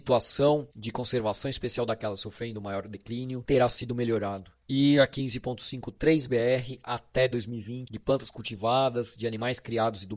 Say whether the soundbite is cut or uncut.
cut